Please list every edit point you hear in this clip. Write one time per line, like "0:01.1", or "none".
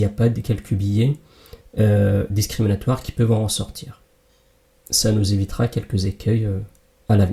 none